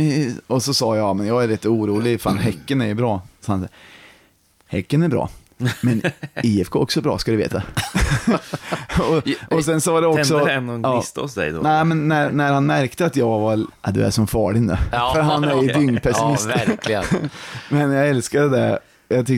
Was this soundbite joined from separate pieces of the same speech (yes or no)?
yes